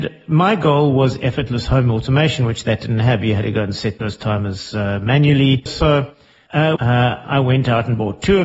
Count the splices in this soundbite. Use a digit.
2